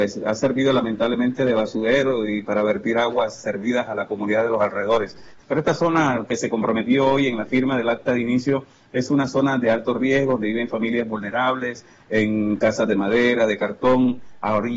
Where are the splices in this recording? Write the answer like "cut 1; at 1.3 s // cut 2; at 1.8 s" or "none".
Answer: cut 1; at 5.4 s

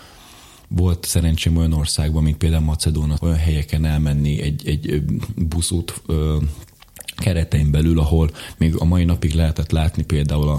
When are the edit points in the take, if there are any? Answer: cut 1; at 3.2 s

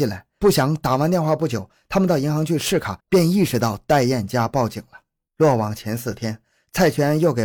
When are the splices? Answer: cut 1; at 3.0 s // cut 2; at 5.2 s

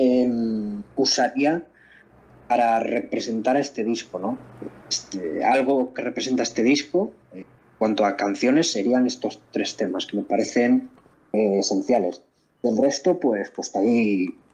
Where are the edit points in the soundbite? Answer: none

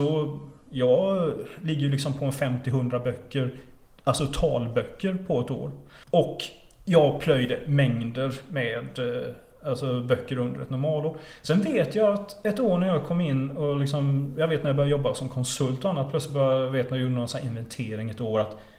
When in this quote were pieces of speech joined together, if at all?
cut 1; at 6.0 s

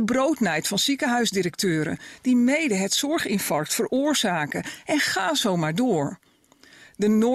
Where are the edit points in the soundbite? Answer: none

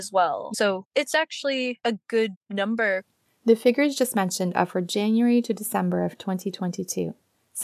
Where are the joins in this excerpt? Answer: none

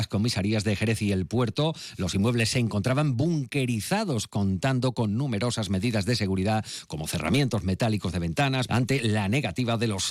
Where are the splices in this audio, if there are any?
cut 1; at 8.7 s

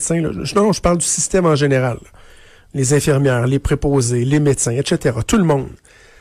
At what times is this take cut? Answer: none

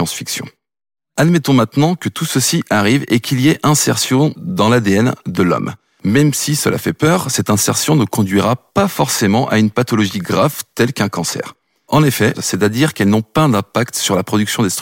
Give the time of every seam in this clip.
cut 1; at 12.3 s

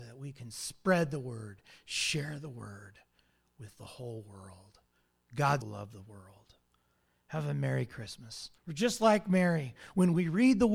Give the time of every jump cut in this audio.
cut 1; at 5.6 s // cut 2; at 8.6 s

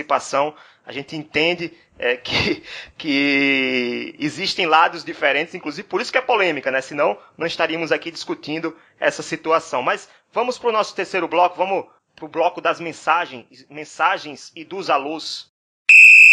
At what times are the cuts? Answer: none

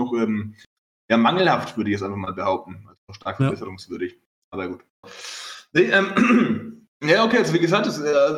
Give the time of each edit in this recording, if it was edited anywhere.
cut 1; at 5.0 s // cut 2; at 6.9 s

